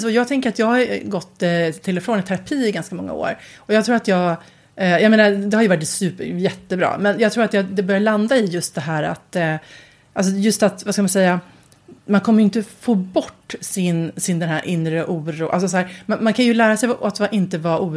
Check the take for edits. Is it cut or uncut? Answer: uncut